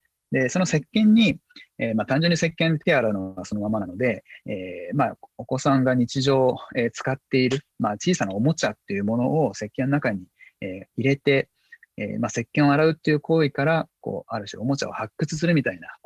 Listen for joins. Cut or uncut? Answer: uncut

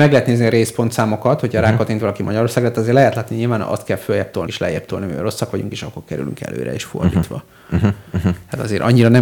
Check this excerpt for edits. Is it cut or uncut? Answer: cut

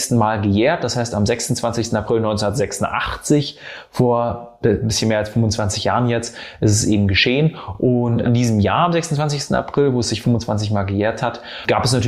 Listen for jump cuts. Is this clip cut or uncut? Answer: uncut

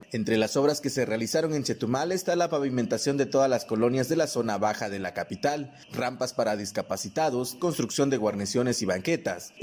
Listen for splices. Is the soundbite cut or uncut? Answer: cut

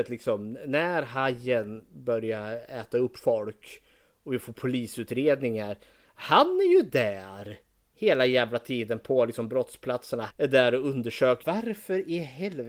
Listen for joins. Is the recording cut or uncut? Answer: cut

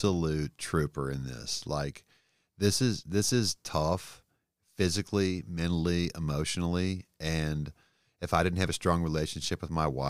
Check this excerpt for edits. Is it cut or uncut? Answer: uncut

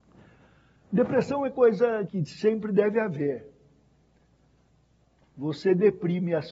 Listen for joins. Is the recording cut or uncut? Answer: cut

